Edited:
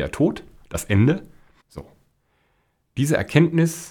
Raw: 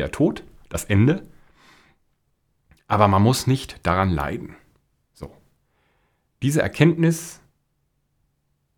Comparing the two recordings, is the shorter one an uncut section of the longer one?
no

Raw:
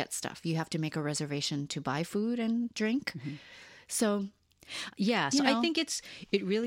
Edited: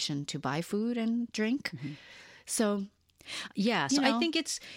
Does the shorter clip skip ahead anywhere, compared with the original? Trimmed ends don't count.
no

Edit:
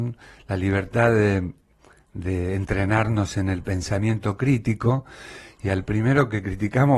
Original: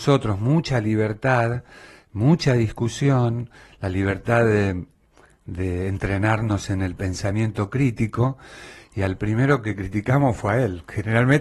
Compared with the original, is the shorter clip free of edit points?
yes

